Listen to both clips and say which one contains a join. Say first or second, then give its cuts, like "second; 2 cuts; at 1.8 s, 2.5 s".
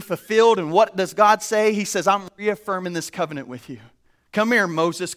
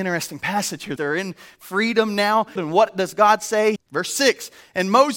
second; 3 cuts; at 1.0 s, 2.6 s, 3.8 s